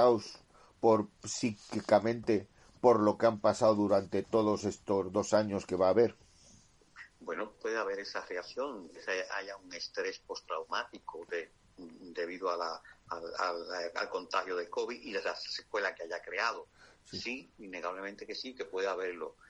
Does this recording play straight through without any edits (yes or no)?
no